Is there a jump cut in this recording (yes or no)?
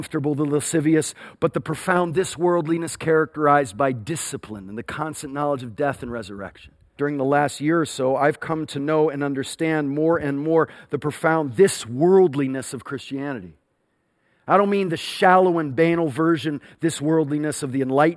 yes